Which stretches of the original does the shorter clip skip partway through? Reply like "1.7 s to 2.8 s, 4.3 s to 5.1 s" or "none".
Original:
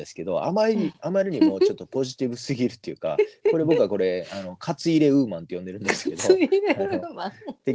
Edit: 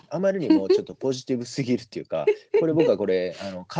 none